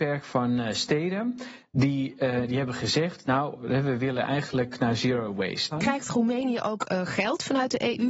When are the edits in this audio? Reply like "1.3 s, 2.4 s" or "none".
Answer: 5.7 s